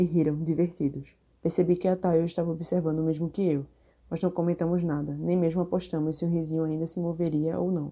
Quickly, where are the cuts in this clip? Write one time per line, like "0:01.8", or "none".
0:01.3